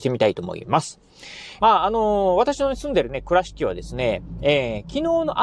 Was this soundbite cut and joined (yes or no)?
yes